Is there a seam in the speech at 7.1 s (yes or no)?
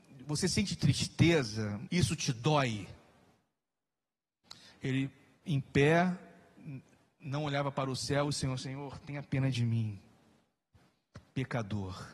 no